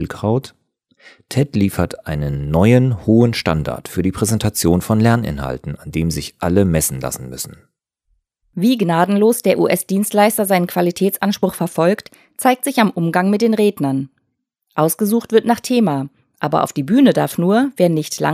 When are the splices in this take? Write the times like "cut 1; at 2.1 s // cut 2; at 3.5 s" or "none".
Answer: none